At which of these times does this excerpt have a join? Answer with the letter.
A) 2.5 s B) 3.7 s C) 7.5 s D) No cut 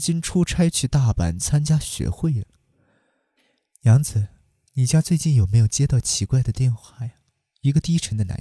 D